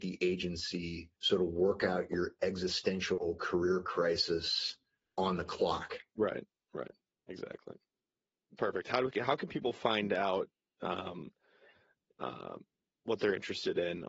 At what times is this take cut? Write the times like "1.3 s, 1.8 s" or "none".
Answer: 1.1 s